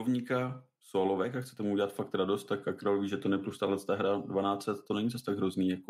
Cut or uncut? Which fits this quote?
uncut